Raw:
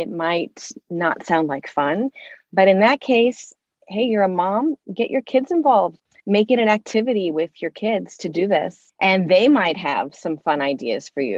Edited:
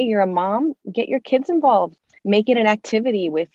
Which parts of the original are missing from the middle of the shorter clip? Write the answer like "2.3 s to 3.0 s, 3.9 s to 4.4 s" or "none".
none

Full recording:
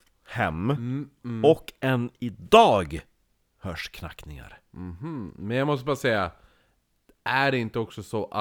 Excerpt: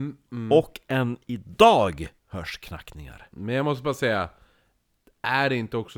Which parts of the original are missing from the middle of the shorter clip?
3.1 s to 3.5 s, 4.6 s to 5.3 s

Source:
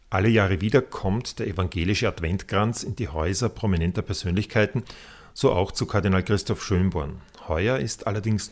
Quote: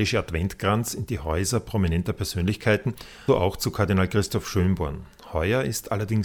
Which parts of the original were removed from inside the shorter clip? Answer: 5.2 s to 5.4 s

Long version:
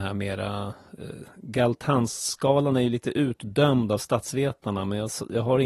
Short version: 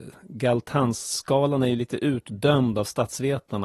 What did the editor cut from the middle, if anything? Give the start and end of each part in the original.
none

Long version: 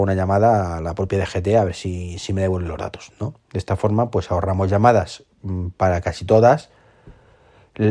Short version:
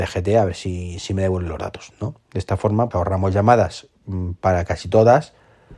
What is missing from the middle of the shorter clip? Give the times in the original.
4.1 s to 4.3 s

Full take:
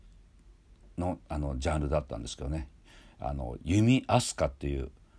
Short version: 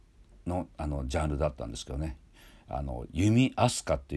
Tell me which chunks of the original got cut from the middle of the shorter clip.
none

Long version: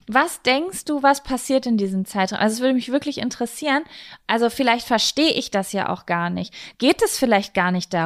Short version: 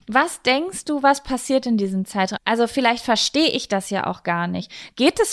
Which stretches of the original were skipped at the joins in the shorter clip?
2.4 s to 4.2 s

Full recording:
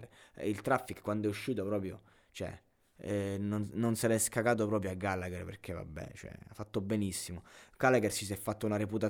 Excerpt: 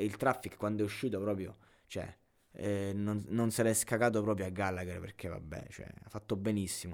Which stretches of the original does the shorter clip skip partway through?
none

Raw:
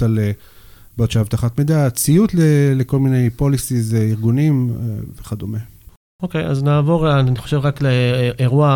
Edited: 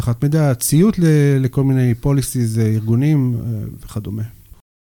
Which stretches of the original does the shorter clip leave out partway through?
none

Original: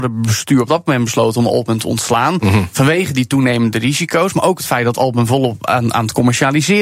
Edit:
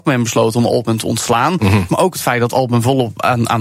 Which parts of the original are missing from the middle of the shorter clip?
2.7 s to 4.3 s

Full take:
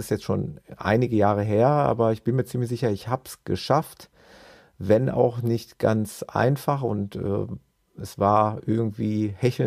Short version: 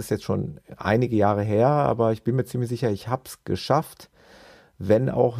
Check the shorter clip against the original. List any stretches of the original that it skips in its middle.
none

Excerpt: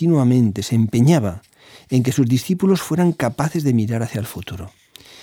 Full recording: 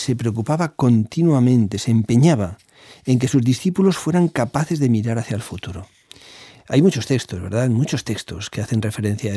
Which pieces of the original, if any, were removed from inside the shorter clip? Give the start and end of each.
none

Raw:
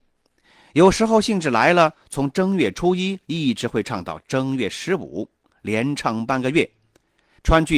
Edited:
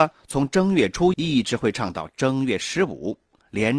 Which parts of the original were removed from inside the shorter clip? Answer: 3.0 s to 3.2 s

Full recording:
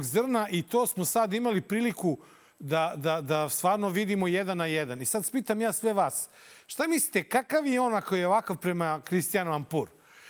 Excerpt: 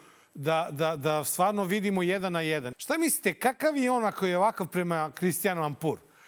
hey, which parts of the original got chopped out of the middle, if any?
5.0 s to 6.6 s

